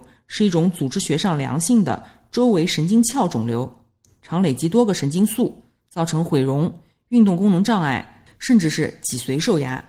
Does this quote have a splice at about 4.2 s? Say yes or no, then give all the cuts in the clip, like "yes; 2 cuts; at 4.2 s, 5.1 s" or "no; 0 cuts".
no; 1 cut; at 8.3 s